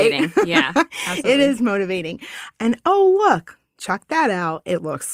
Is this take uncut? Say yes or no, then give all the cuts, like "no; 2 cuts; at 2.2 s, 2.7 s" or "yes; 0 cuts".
no; 1 cut; at 2.5 s